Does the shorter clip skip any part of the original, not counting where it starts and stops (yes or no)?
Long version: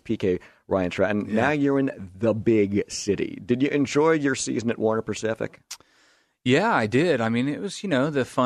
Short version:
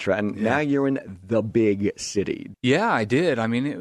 yes